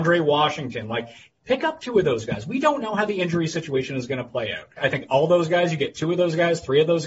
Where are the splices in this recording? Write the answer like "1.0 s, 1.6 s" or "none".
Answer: 4.8 s